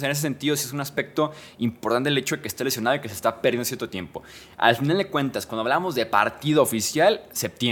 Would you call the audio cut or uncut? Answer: uncut